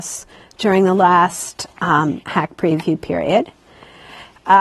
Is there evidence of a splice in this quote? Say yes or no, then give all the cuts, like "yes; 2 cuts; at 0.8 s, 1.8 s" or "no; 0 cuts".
no; 0 cuts